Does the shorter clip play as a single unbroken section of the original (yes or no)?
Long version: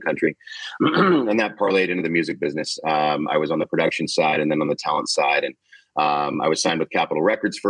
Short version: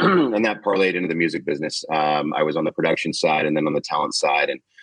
yes